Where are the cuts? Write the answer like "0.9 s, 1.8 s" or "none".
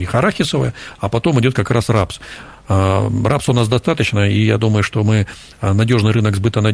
none